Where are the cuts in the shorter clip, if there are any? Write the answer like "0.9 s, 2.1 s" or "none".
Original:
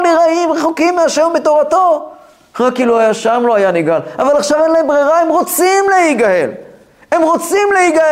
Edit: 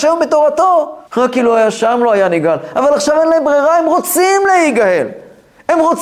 1.1 s